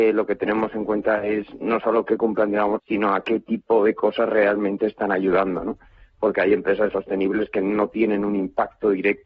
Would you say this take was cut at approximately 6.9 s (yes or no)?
yes